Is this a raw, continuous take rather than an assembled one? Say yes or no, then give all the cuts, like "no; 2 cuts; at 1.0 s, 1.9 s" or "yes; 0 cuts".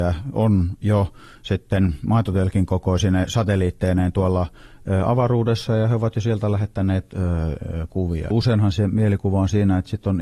no; 1 cut; at 8.3 s